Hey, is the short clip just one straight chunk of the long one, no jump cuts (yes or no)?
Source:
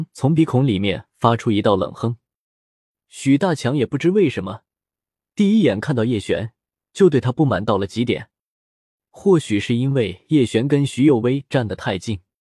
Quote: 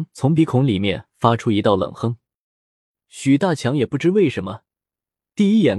yes